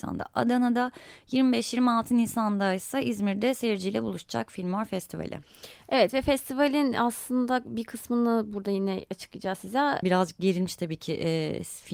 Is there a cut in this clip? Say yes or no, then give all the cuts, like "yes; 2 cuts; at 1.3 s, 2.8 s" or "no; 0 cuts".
yes; 1 cut; at 10.0 s